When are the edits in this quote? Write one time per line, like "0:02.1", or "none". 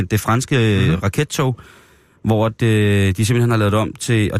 none